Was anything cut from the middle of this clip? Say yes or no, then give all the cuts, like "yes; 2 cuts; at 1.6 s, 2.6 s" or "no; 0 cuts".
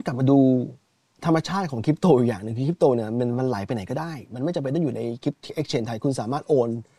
no; 0 cuts